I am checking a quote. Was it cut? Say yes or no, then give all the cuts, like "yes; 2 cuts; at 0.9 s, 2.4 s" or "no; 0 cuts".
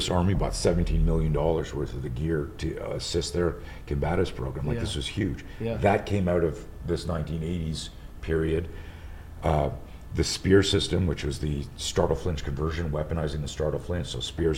no; 0 cuts